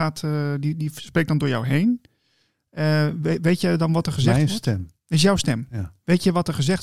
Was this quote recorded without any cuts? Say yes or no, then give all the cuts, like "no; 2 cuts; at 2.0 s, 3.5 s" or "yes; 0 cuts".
yes; 0 cuts